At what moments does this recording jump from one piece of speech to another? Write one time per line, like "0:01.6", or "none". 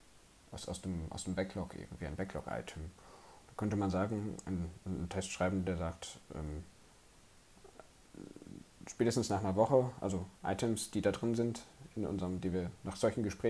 none